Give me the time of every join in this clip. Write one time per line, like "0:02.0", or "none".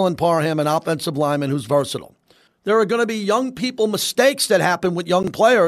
0:02.5